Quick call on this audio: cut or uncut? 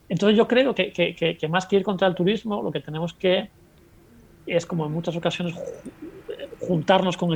uncut